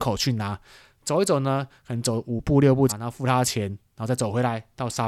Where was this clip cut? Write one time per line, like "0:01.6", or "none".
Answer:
0:02.9